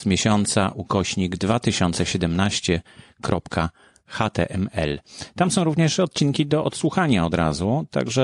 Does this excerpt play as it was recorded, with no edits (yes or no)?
yes